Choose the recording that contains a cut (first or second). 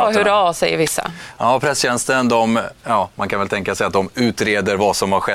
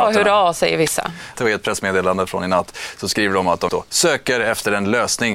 second